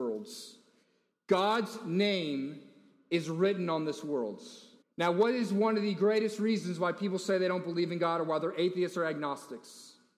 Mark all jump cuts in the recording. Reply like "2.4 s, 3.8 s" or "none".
4.8 s

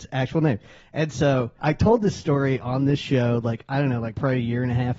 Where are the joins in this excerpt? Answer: 1.6 s

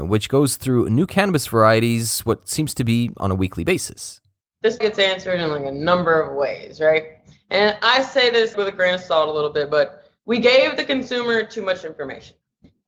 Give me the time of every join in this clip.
4.8 s, 7.3 s, 8.5 s

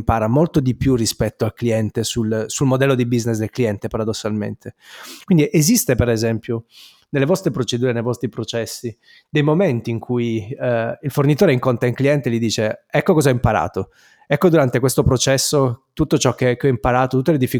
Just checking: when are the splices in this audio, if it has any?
none

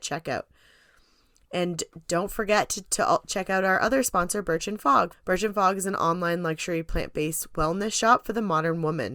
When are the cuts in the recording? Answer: none

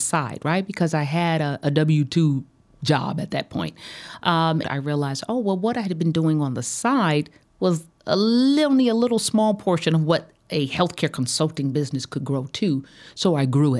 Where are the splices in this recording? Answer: 4.6 s

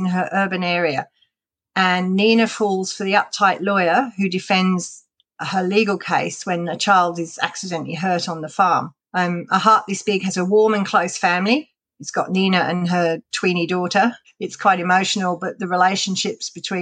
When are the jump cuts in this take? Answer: 14.2 s

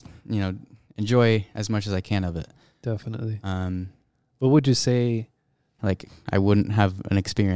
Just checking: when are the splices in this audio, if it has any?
5.8 s

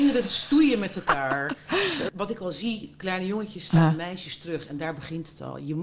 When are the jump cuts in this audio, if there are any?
2.1 s

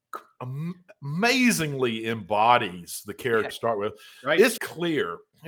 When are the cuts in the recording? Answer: 3.5 s, 4.6 s

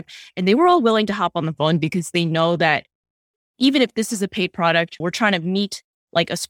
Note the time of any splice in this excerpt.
5.0 s

